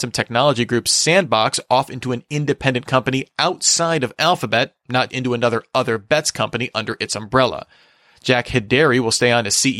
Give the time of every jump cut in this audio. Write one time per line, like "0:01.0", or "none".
0:05.1

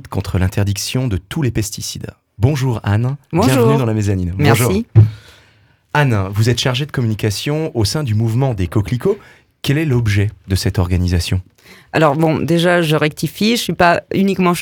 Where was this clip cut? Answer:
none

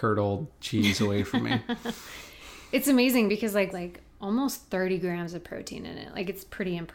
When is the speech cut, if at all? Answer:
0:03.7

